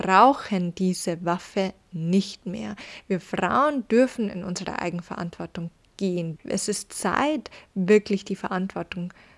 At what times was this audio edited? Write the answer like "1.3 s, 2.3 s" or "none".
6.4 s